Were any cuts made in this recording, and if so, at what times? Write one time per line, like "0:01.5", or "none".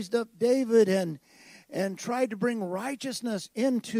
none